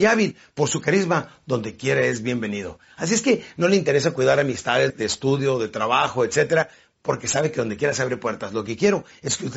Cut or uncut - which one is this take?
cut